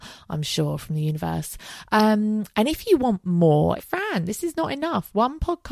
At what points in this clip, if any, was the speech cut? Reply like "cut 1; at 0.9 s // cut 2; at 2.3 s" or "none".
cut 1; at 3.8 s